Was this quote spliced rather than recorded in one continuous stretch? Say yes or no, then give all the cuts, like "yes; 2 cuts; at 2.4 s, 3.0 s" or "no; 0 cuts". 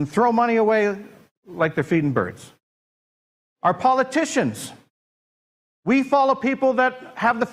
yes; 1 cut; at 3.4 s